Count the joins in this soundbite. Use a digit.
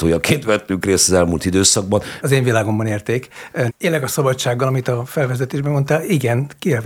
2